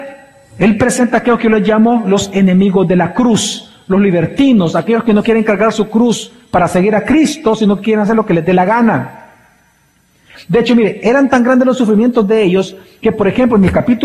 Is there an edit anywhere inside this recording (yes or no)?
yes